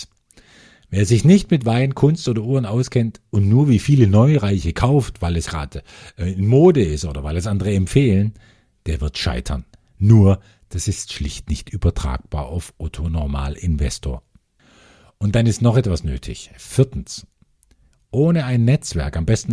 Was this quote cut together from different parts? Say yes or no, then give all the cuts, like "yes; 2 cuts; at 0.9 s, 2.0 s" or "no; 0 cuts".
yes; 2 cuts; at 5.5 s, 9.9 s